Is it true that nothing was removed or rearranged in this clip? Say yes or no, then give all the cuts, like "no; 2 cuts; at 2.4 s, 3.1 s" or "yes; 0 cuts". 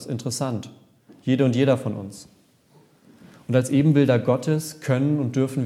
yes; 0 cuts